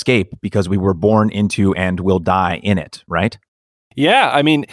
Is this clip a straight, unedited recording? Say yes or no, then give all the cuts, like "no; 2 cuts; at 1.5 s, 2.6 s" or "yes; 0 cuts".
yes; 0 cuts